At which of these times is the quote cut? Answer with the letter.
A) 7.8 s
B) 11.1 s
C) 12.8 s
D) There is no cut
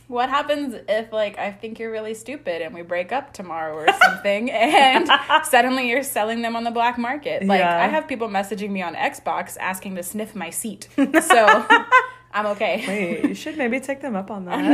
D